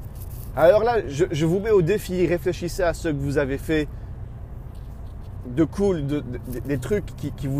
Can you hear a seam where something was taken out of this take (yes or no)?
no